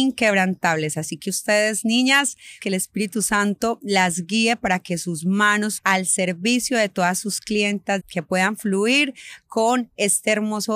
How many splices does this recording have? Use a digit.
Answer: 3